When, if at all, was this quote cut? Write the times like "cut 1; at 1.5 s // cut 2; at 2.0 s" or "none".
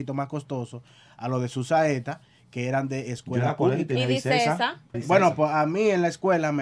cut 1; at 4.9 s